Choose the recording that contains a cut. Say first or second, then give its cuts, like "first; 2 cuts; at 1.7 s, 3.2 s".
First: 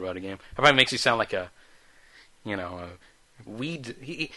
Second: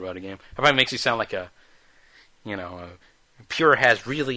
first; 1 cut; at 3.5 s